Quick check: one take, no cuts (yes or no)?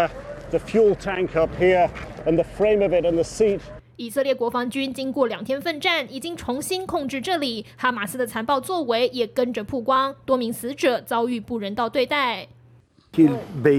yes